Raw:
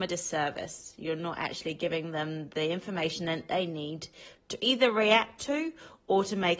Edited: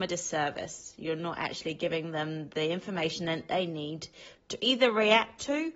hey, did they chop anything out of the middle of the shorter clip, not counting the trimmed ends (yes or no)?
no